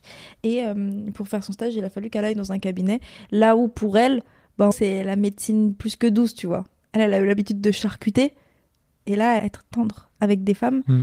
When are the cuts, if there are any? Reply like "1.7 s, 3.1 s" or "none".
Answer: 4.7 s, 9.4 s